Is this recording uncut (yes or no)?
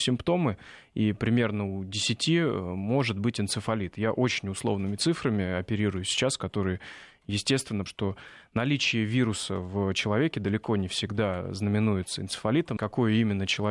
no